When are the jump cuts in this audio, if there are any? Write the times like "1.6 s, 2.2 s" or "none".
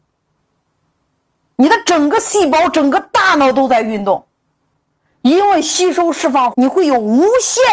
6.5 s